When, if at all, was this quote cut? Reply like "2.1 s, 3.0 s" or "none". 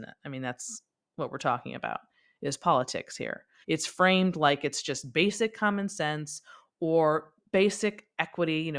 3.6 s